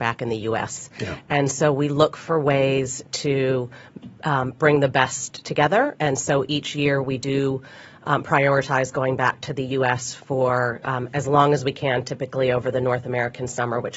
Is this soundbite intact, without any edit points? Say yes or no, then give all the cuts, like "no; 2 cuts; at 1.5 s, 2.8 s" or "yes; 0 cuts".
yes; 0 cuts